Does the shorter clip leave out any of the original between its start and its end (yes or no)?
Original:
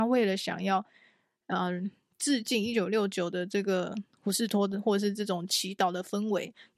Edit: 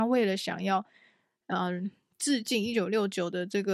no